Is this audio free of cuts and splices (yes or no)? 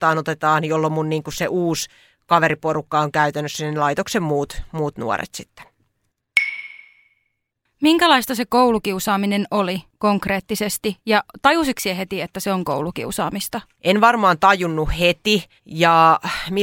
no